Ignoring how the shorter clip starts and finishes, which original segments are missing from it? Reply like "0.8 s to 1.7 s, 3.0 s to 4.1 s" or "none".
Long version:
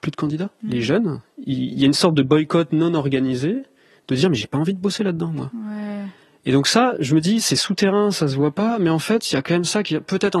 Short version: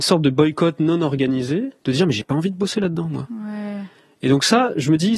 3.7 s to 4.0 s